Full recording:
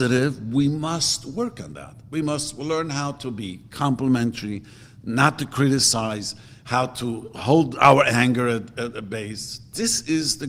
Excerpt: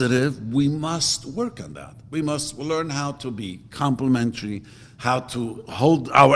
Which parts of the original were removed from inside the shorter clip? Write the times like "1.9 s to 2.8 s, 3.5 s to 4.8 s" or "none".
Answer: 5.0 s to 6.6 s